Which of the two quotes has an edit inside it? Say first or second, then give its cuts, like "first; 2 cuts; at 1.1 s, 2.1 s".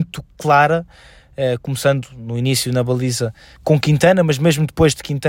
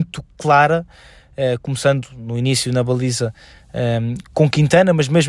first; 1 cut; at 3.6 s